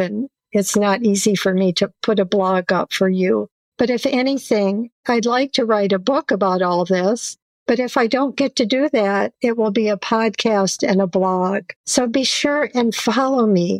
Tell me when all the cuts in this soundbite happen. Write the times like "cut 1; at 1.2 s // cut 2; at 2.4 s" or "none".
cut 1; at 11.8 s